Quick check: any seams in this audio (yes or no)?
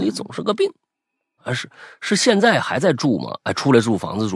yes